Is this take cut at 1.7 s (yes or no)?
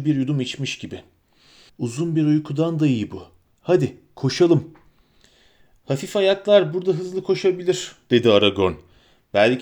yes